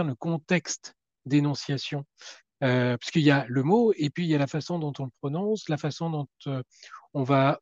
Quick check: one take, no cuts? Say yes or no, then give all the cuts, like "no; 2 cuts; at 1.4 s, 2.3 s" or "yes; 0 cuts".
yes; 0 cuts